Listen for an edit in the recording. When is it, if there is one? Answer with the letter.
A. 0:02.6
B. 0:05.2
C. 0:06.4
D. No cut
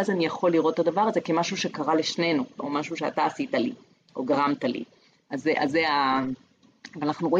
A